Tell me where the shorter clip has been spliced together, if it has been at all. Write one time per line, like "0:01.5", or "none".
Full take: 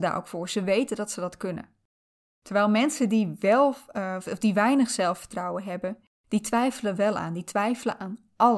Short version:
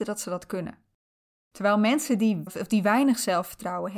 0:02.5

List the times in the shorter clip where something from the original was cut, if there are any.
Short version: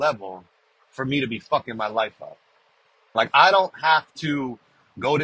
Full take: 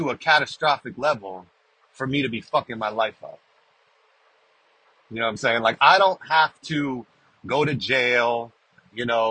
0:03.1

